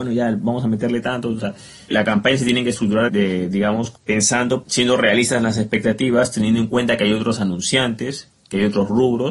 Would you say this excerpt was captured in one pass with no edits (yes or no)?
no